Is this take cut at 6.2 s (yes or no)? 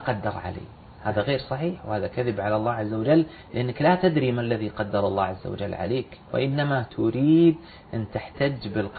yes